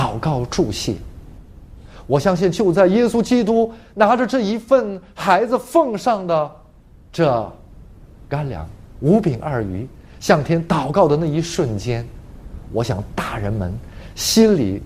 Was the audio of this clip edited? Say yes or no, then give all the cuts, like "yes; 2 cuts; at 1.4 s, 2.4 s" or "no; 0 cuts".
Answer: no; 0 cuts